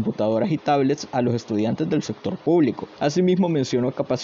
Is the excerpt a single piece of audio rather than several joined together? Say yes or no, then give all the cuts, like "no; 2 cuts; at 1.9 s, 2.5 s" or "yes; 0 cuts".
no; 1 cut; at 3.0 s